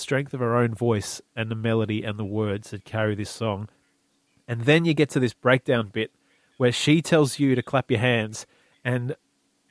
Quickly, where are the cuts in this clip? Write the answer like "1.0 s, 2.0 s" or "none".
none

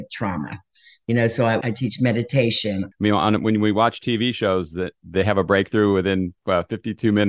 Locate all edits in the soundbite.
1.6 s, 2.9 s

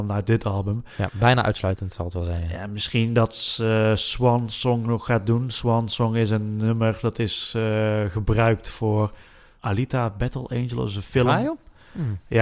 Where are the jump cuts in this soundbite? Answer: none

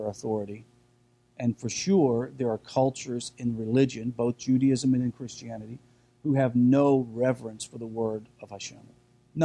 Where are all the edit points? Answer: none

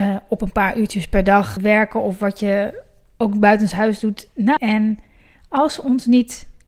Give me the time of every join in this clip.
1.6 s, 4.6 s

